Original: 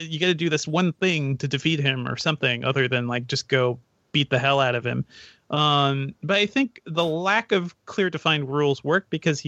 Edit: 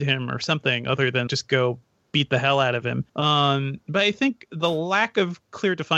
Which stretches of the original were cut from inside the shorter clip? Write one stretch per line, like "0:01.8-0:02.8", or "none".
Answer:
0:03.0-0:03.3
0:05.1-0:05.4